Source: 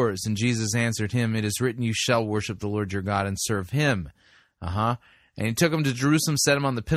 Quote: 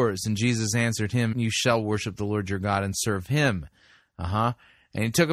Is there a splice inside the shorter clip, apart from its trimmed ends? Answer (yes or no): yes